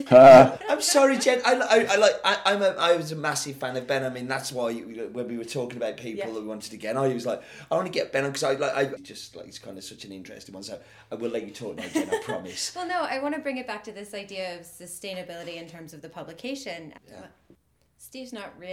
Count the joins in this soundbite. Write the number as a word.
two